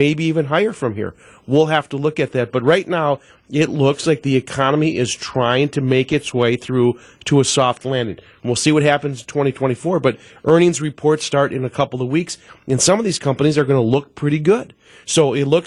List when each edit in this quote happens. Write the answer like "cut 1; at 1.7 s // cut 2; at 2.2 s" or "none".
none